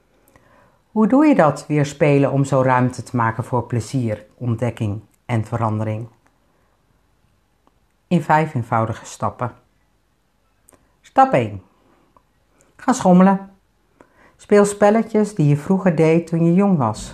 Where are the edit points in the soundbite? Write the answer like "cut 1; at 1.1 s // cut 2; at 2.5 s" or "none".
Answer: cut 1; at 4.3 s